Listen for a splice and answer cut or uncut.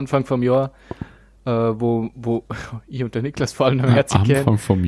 uncut